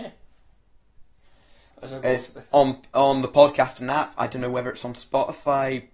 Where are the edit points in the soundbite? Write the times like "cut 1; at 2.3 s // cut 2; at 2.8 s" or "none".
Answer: cut 1; at 1.7 s